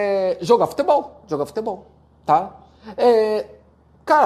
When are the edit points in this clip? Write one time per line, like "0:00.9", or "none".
none